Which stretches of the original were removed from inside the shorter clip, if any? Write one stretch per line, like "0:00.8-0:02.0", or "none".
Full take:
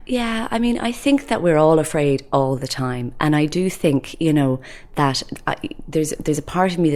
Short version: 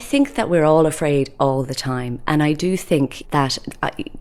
0:04.2-0:04.9

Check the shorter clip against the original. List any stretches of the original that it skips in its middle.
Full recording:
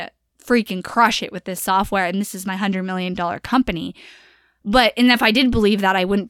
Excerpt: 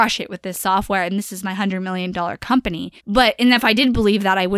0:04.0-0:04.6

